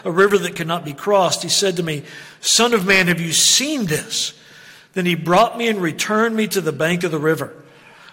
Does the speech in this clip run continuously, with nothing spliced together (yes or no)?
yes